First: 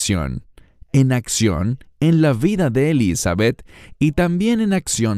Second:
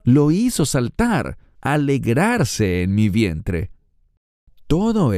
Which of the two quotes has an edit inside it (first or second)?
second